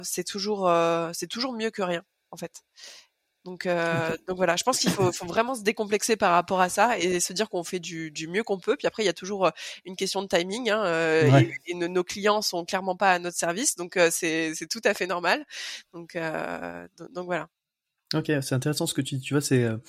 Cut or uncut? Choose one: uncut